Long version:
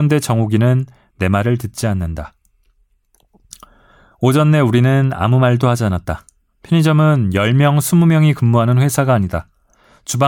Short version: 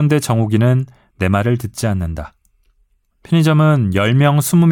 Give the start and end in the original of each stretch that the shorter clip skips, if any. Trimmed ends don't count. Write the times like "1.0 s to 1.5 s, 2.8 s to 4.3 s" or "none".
3.1 s to 6.5 s